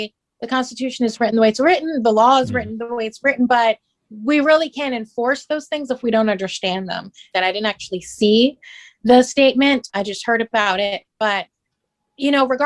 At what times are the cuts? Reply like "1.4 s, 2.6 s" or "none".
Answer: 7.3 s, 9.9 s